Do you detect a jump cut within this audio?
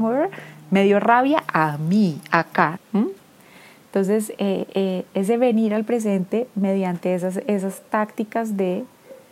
yes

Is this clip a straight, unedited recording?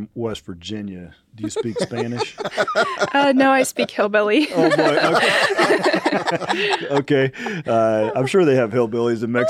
yes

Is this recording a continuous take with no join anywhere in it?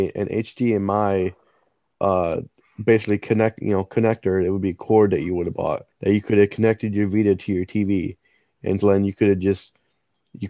no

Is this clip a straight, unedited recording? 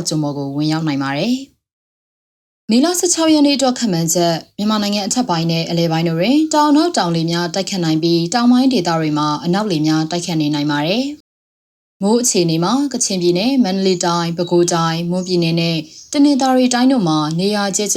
no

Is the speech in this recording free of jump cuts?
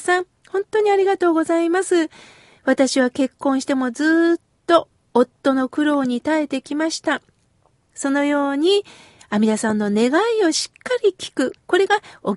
no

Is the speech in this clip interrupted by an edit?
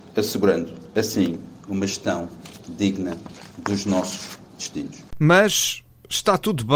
no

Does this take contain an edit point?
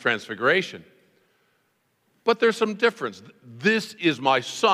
no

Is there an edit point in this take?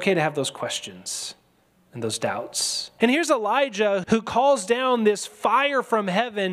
yes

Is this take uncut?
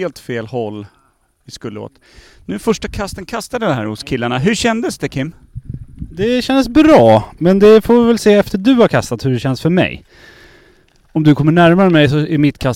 yes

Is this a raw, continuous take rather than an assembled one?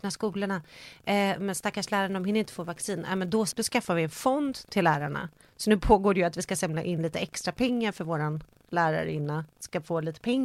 no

